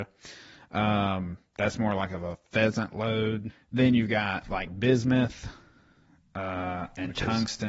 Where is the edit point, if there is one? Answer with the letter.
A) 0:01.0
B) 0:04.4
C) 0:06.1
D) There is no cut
D